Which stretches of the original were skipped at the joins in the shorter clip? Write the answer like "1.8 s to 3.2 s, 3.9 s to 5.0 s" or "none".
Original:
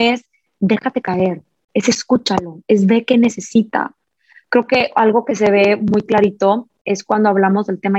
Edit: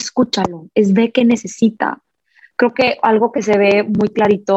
none